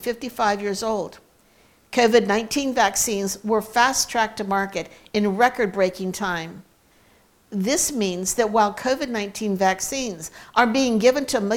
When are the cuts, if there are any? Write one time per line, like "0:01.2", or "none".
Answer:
0:01.8
0:07.3

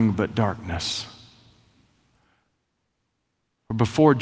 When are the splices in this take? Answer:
none

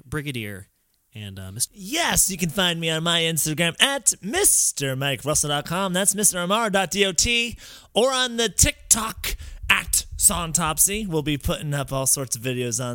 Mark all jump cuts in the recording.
0:01.7

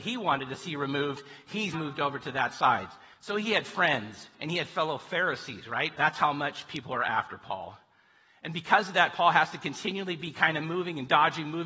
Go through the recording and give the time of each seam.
0:01.7
0:04.3
0:06.0

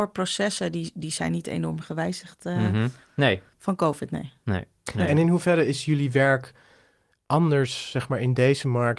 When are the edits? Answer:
0:03.0

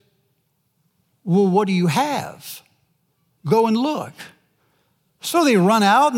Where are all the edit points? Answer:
none

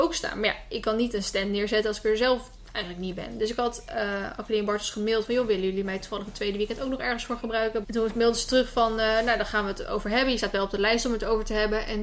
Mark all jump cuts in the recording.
0:07.8

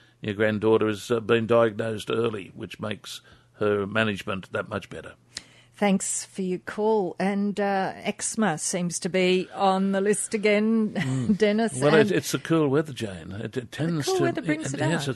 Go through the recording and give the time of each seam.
none

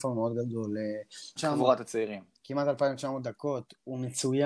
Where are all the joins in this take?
0:01.4

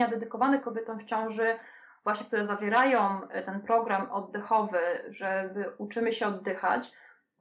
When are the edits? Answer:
none

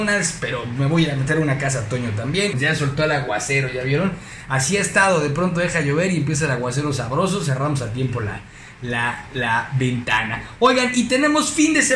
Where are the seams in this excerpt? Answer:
0:02.5

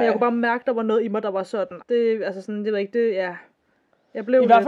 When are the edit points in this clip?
0:01.8

